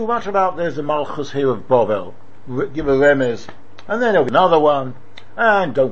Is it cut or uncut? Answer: cut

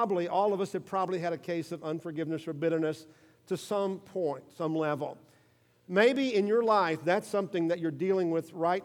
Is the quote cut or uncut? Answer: uncut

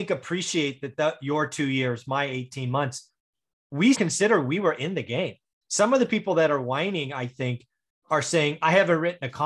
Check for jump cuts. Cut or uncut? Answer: cut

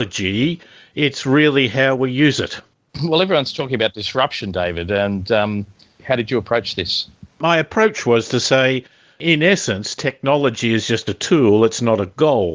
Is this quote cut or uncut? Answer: uncut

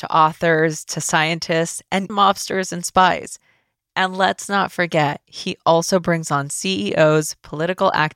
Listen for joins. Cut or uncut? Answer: cut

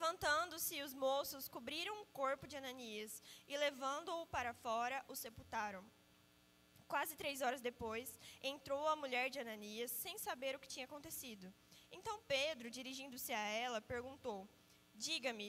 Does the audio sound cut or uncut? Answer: uncut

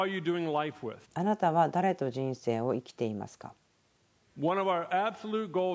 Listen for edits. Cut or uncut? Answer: cut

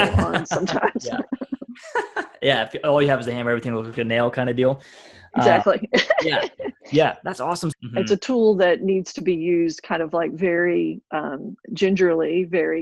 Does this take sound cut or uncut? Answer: cut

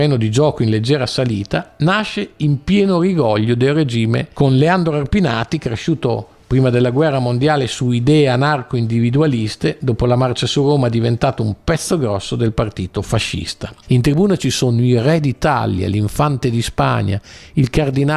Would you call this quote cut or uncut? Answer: cut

